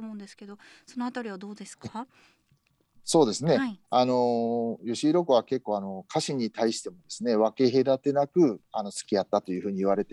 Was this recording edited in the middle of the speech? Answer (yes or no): no